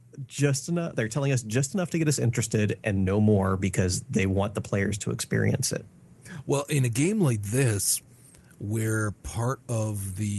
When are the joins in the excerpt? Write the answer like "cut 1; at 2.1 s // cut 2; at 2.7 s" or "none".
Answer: none